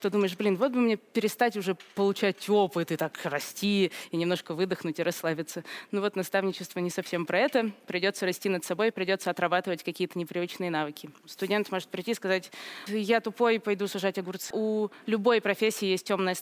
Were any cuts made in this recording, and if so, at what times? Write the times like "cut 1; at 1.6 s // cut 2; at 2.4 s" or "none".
cut 1; at 12.9 s // cut 2; at 14.5 s

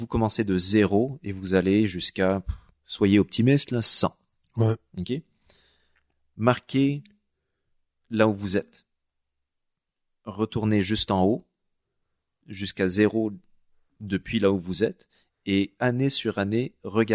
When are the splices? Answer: none

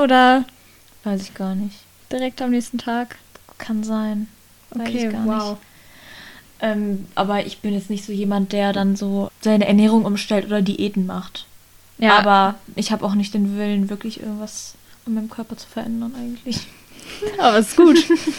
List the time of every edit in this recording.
cut 1; at 9.3 s

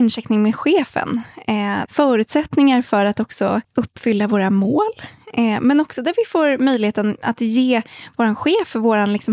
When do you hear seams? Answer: cut 1; at 1.9 s // cut 2; at 3.6 s

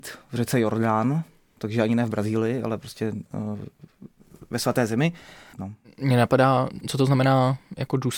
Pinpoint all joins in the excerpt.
cut 1; at 5.5 s // cut 2; at 6.8 s

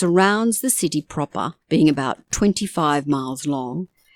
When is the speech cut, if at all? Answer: cut 1; at 1.6 s

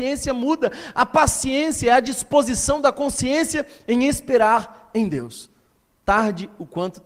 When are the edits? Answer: none

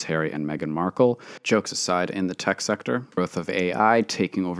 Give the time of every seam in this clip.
none

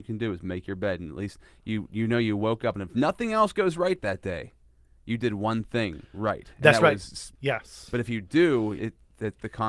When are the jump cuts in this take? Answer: cut 1; at 7.3 s // cut 2; at 8.8 s

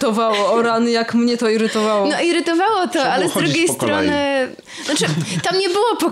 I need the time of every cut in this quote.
none

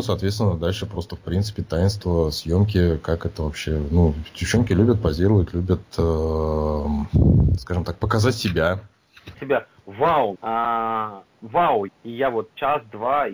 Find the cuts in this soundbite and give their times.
cut 1; at 9.3 s // cut 2; at 10.4 s // cut 3; at 11.9 s

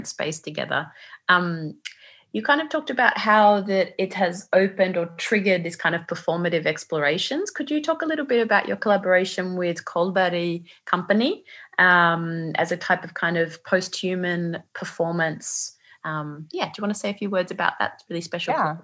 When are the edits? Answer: cut 1; at 16.0 s

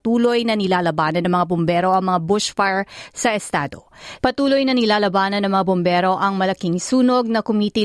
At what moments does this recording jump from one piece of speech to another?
cut 1; at 4.2 s

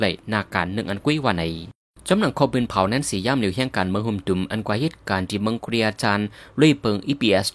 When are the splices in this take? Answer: none

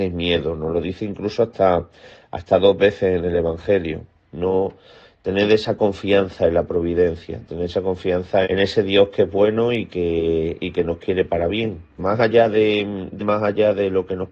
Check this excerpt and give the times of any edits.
cut 1; at 8.4 s // cut 2; at 12.0 s // cut 3; at 13.2 s

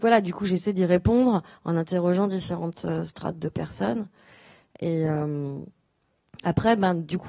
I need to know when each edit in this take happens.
none

